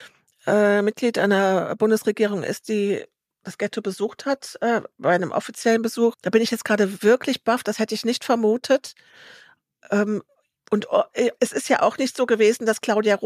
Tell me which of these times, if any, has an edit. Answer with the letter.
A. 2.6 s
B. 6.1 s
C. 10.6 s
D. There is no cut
B